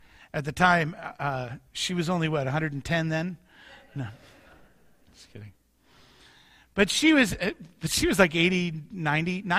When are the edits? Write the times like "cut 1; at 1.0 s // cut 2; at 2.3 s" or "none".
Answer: none